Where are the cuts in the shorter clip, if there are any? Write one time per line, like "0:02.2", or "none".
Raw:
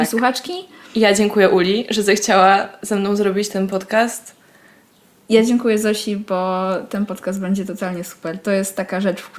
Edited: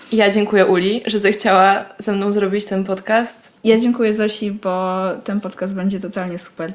0:03.6